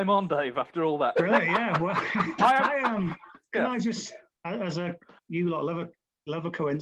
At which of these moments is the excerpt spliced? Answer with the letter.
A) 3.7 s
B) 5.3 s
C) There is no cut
B